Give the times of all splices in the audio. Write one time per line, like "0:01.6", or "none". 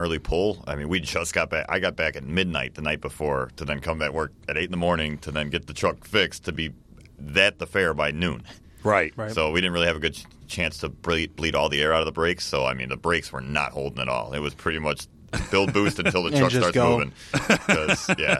none